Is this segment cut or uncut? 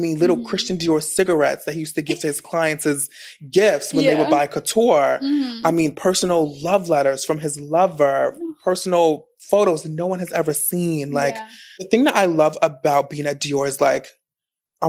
uncut